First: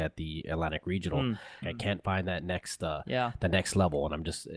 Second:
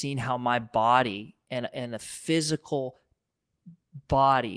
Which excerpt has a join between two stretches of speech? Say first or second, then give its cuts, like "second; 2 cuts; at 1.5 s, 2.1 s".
first; 1 cut; at 1.6 s